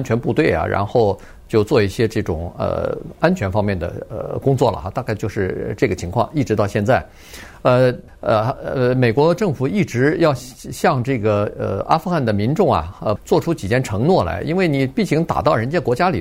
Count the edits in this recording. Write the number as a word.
two